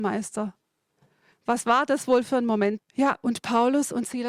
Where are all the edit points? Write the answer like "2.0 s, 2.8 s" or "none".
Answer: 1.3 s, 2.8 s